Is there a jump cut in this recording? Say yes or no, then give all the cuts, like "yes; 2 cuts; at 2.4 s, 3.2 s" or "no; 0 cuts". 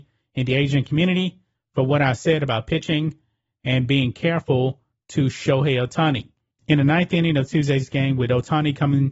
yes; 1 cut; at 6.5 s